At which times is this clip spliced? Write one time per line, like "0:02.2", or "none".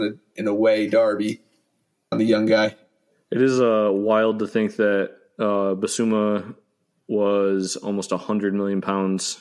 0:02.1